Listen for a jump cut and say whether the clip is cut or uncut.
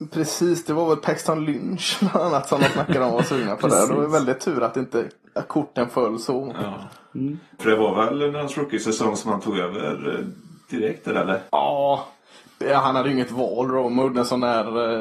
cut